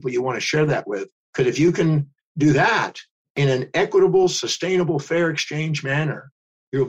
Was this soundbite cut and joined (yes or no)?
no